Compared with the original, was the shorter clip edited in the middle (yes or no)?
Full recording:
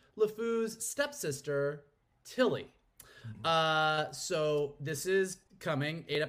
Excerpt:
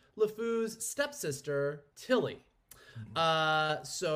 yes